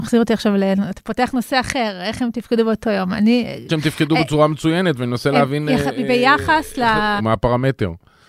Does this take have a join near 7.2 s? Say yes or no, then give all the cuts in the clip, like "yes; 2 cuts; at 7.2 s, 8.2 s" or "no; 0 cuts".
yes; 2 cuts; at 3.7 s, 7.2 s